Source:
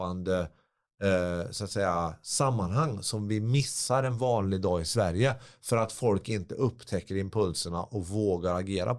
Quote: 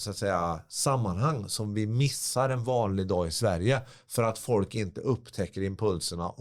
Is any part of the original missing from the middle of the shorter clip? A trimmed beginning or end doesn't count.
no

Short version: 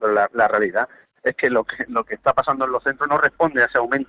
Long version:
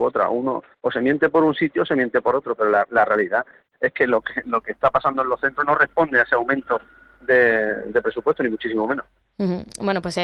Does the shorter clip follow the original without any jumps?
yes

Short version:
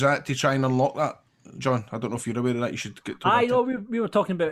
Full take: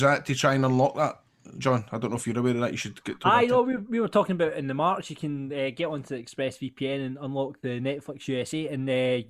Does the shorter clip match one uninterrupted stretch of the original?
yes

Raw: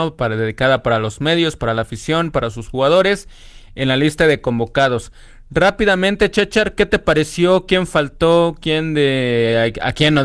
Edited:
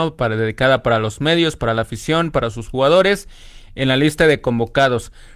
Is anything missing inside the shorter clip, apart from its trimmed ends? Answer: no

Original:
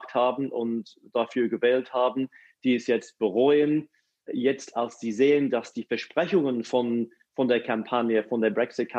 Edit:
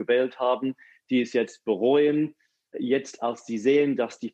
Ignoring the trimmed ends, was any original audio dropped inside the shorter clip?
no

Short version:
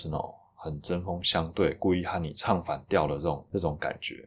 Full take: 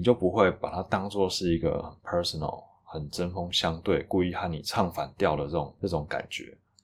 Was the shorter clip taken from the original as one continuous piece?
yes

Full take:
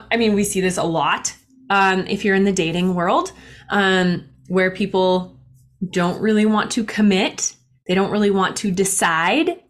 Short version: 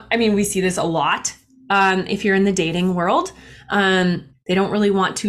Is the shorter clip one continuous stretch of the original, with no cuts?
no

